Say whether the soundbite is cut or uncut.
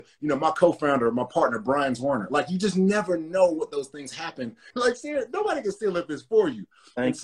cut